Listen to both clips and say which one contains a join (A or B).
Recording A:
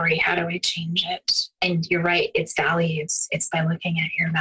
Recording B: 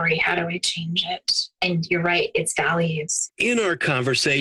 B